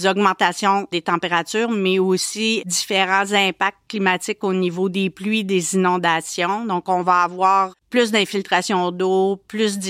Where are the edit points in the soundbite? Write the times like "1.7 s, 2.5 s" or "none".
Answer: 7.8 s